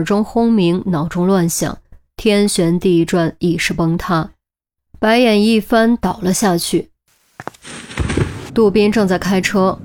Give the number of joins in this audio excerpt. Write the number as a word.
one